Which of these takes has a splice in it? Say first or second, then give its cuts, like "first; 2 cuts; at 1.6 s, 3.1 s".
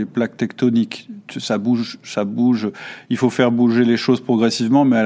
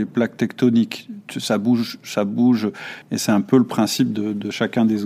second; 1 cut; at 3.0 s